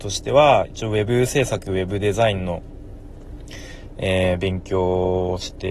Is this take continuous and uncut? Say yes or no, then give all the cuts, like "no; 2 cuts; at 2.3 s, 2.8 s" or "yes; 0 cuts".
yes; 0 cuts